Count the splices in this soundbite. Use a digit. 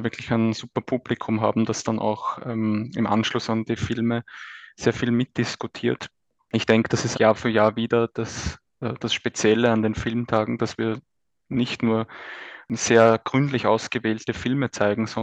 1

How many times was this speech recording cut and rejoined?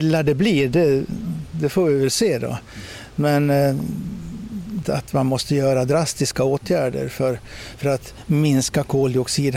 1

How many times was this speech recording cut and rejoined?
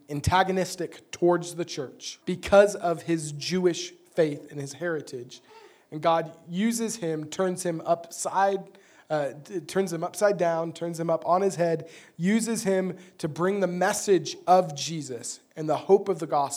1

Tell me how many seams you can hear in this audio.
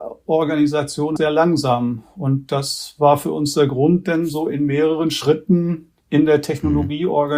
2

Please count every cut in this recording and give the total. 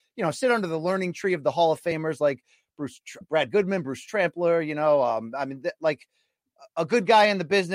1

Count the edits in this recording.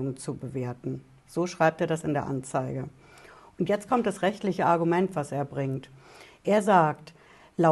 0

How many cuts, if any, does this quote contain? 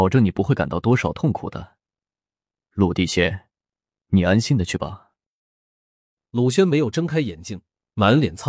0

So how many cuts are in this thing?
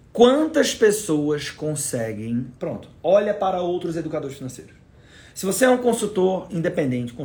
1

